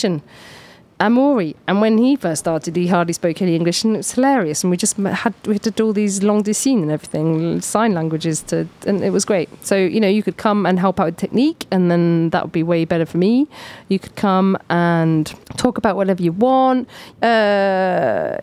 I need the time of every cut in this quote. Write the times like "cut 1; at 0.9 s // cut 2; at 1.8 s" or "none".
cut 1; at 15.4 s // cut 2; at 17.1 s